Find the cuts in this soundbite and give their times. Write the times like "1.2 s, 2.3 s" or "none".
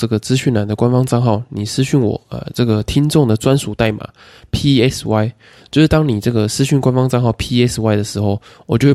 none